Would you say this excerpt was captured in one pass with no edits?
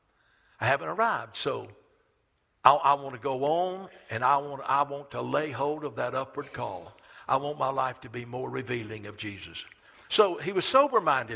yes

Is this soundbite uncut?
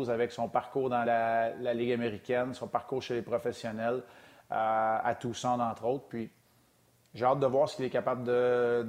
yes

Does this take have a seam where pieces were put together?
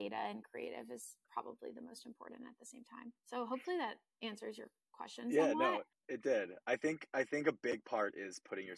no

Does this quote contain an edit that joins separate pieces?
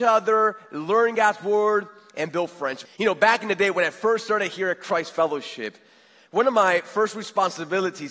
yes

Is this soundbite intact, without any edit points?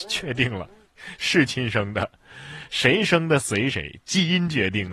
yes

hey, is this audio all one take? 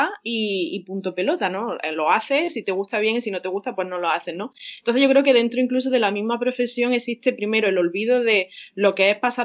yes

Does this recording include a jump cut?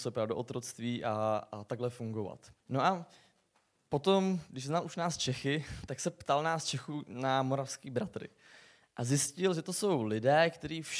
yes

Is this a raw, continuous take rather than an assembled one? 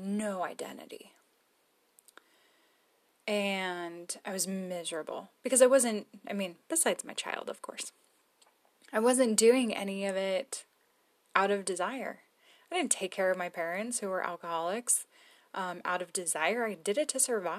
yes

